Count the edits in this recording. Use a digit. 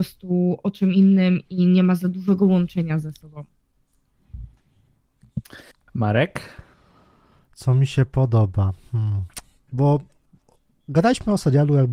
1